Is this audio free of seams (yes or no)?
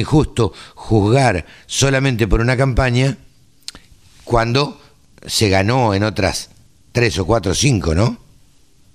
yes